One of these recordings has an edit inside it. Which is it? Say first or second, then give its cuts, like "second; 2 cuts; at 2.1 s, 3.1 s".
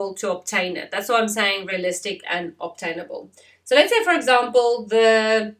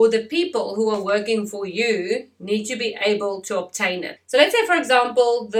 second; 1 cut; at 4.2 s